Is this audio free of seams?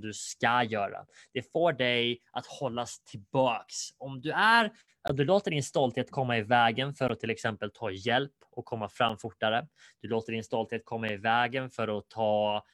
yes; 0 cuts

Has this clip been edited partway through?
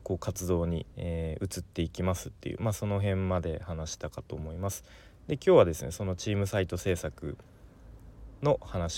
yes; 1 cut; at 0.9 s

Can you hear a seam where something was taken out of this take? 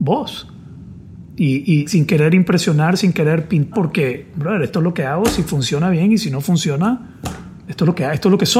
yes; 3 cuts; at 1.9 s, 3.7 s, 7.7 s

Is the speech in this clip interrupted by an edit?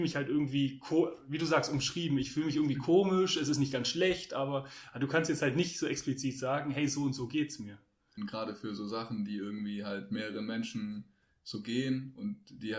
yes; 1 cut; at 8.2 s

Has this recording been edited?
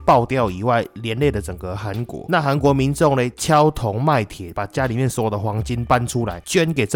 no; 0 cuts

